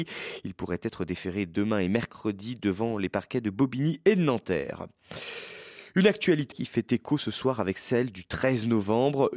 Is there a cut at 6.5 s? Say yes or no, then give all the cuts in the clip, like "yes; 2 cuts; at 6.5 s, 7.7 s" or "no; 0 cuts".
yes; 1 cut; at 6.5 s